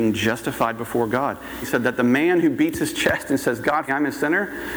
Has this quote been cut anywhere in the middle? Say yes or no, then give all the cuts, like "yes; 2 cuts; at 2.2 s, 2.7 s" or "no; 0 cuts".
yes; 2 cuts; at 1.6 s, 3.9 s